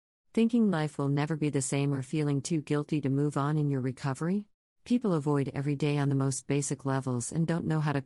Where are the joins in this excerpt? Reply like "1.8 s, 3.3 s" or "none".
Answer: 4.6 s